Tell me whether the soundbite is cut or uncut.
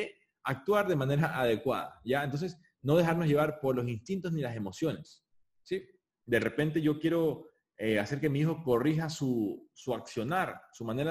uncut